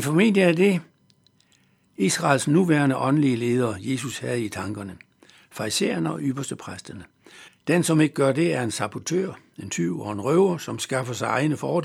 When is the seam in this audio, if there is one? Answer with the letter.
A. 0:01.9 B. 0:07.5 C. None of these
B